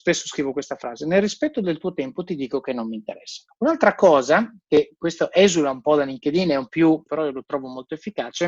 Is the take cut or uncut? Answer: cut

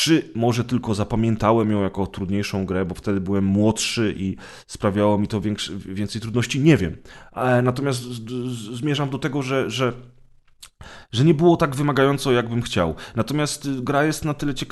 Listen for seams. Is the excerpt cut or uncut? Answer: uncut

